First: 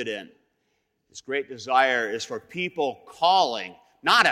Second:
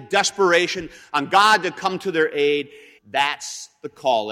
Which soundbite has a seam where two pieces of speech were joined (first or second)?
second